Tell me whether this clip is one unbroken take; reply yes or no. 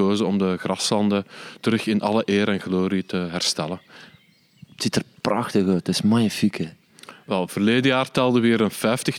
yes